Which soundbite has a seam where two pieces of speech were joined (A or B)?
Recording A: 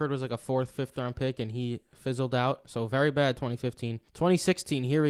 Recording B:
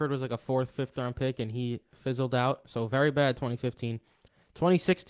A